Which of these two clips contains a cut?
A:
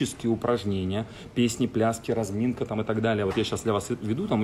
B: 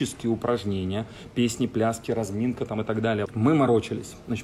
B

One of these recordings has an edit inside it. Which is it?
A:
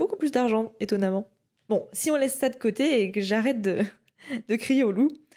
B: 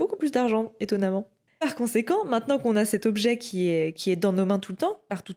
B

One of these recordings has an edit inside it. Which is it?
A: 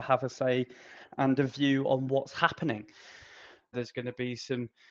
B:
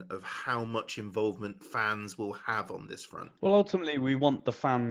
A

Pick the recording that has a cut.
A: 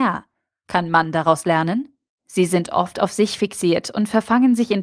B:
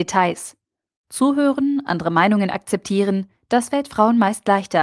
A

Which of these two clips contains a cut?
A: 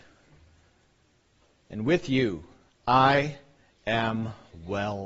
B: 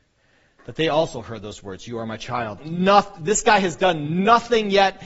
B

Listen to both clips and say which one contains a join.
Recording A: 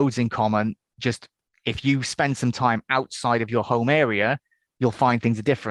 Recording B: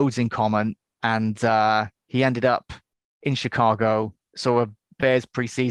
B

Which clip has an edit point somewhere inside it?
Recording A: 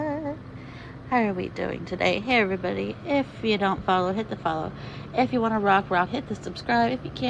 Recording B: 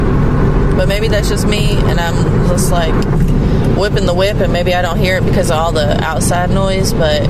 A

